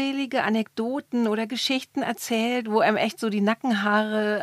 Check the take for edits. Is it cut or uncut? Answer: uncut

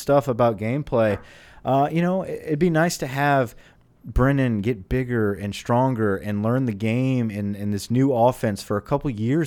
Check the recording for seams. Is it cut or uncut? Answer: uncut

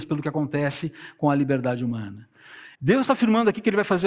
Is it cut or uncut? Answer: cut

